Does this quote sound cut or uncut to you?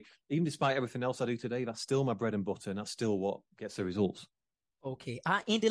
uncut